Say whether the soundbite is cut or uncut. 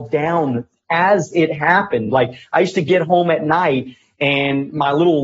uncut